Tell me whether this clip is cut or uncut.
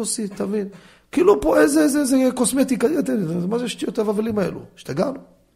uncut